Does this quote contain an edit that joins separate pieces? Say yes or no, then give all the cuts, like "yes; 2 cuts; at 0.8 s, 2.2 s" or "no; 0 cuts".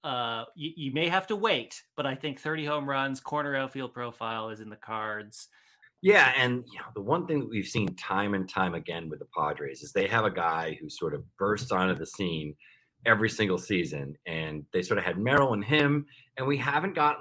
yes; 1 cut; at 5.8 s